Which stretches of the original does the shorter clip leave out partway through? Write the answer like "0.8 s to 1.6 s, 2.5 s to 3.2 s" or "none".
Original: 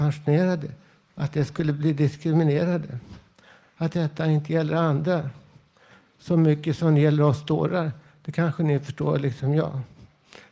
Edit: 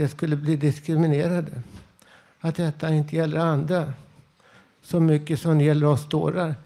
none

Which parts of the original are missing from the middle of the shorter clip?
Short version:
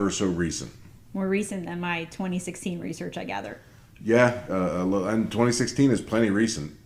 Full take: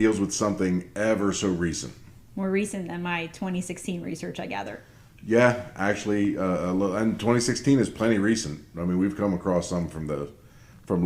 5.7 s to 6.4 s

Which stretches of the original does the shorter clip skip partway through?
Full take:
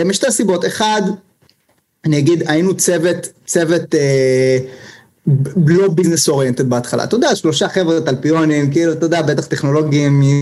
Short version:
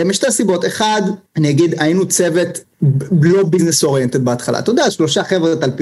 1.3 s to 1.9 s, 3.3 s to 5.1 s

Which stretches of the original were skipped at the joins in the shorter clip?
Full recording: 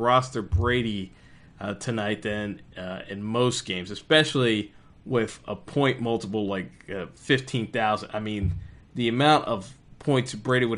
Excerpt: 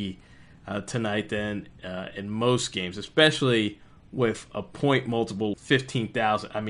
6.5 s to 7.1 s

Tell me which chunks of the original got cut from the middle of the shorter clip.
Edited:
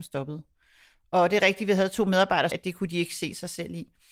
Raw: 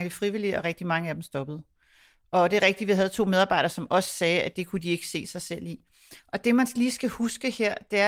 3.7 s to 4.4 s

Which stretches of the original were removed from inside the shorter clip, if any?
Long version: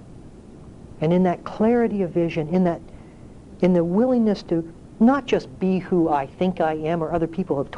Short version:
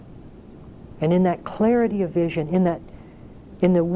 none

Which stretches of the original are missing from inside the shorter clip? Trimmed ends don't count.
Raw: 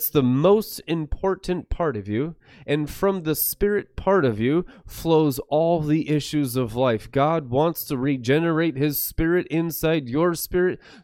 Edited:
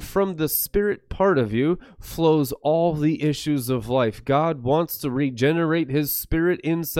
none

